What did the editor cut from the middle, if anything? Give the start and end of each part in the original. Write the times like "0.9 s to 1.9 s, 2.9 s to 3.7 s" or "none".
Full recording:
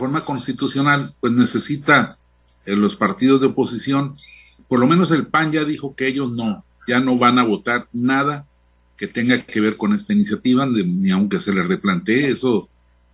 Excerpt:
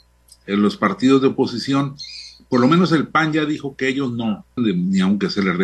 6.8 s to 10.7 s